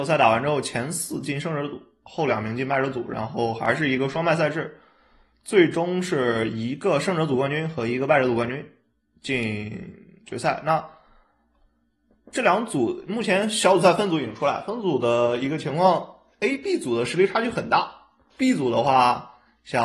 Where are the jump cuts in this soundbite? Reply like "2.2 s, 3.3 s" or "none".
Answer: none